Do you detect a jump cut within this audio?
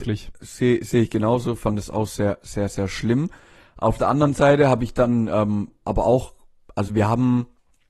no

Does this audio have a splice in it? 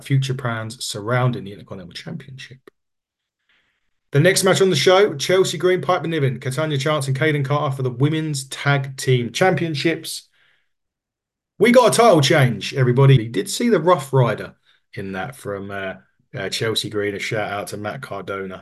yes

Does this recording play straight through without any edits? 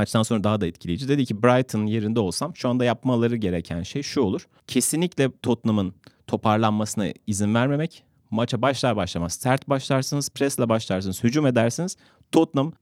yes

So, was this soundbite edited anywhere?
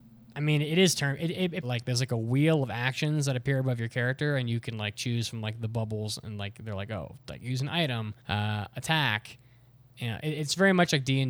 yes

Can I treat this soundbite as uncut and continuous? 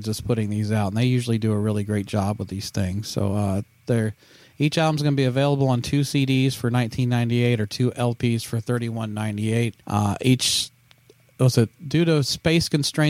no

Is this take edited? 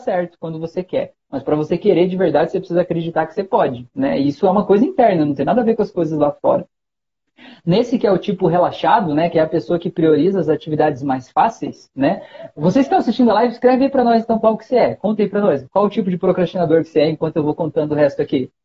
no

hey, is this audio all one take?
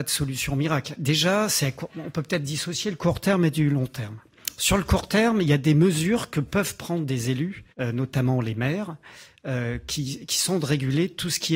no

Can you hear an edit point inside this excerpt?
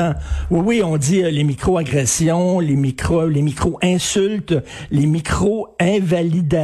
no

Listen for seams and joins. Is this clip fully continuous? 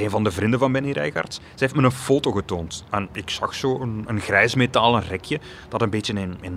yes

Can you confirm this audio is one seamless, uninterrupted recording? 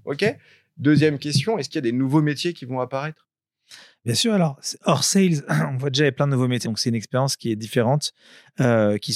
no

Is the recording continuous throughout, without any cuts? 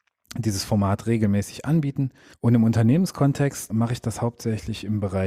no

